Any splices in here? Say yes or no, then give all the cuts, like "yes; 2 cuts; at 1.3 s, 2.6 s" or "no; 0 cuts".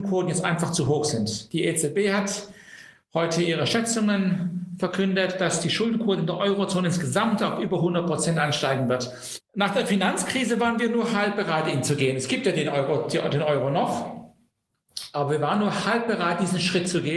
yes; 1 cut; at 9.4 s